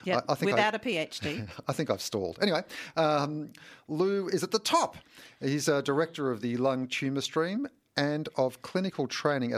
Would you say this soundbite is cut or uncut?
uncut